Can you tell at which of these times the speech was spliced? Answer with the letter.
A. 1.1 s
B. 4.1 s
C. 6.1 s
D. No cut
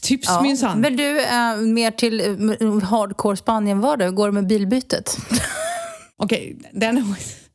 C